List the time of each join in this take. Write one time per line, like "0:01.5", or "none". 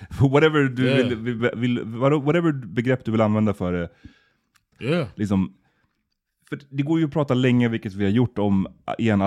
0:01.4
0:04.7